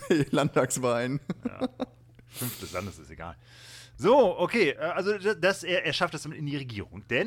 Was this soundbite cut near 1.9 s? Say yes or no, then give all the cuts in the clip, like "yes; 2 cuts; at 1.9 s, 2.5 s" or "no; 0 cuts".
no; 1 cut; at 4.8 s